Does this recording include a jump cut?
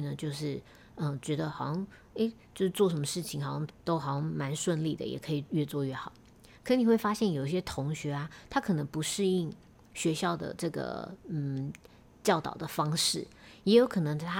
yes; 1 cut; at 3.7 s

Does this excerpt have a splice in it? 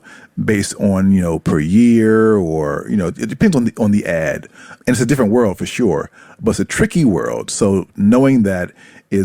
no; 0 cuts

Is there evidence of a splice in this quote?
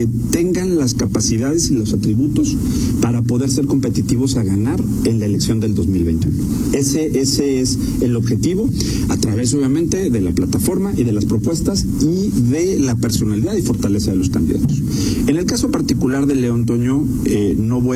no; 0 cuts

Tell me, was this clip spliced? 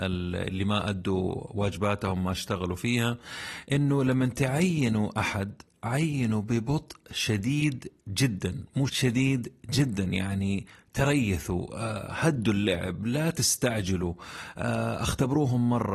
yes; 1 cut; at 8.9 s

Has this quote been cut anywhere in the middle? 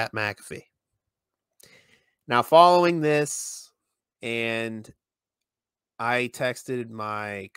yes; 1 cut; at 4.0 s

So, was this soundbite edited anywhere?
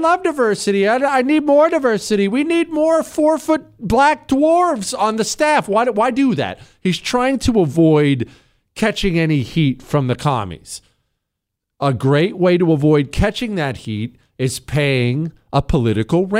no; 0 cuts

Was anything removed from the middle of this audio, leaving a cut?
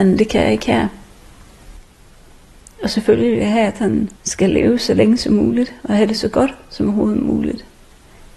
yes; 1 cut; at 4.2 s

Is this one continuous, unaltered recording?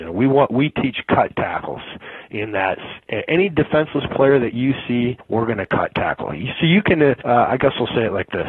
yes; 0 cuts

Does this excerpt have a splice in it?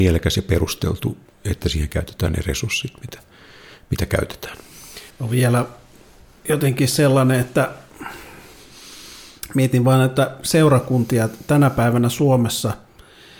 yes; 1 cut; at 5.1 s

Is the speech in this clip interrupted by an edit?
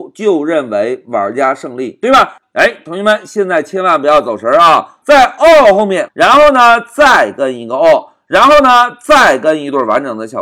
yes; 3 cuts; at 2.4 s, 5.0 s, 6.1 s

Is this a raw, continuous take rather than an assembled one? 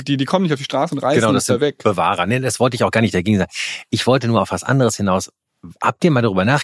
yes; 0 cuts

